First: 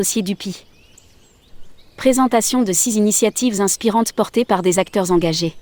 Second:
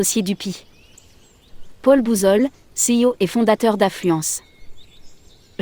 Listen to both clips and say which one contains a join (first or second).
first